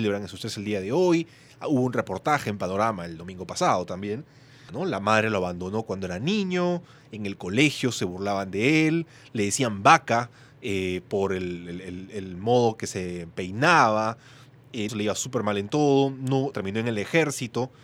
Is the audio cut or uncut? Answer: cut